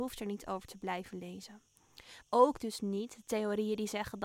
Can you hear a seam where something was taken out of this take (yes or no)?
yes